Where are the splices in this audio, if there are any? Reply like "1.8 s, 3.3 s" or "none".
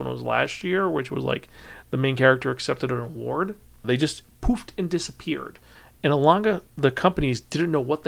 3.8 s, 6.7 s